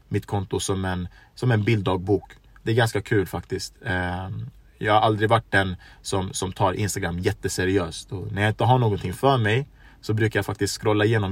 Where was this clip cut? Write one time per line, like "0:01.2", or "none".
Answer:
none